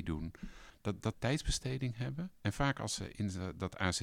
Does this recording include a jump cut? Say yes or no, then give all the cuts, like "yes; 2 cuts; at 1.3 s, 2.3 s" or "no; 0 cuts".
yes; 1 cut; at 1.1 s